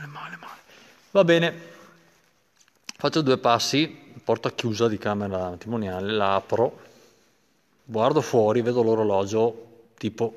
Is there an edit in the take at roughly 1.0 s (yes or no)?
no